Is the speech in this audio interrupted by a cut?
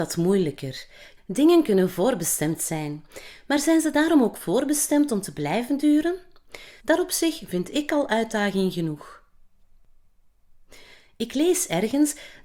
yes; 2 cuts; at 1.2 s, 6.8 s

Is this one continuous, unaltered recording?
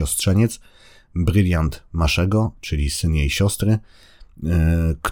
no; 1 cut; at 2.6 s

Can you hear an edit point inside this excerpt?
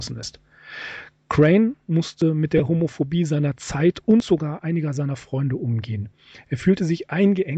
no; 0 cuts

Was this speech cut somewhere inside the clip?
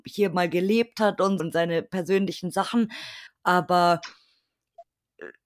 yes; 2 cuts; at 1.4 s, 3.3 s

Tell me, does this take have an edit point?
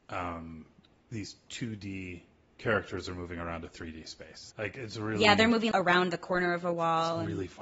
yes; 2 cuts; at 4.5 s, 5.7 s

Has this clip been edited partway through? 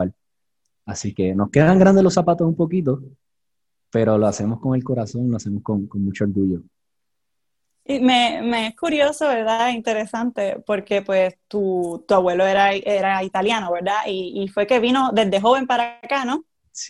no; 0 cuts

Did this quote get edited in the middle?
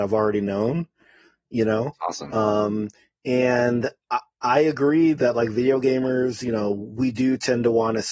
no; 0 cuts

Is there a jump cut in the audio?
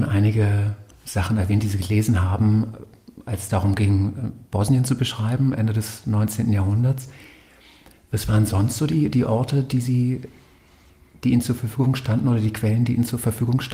no; 0 cuts

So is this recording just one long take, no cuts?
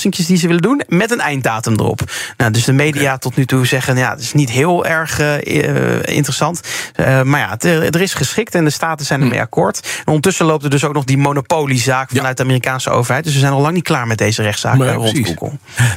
yes; 0 cuts

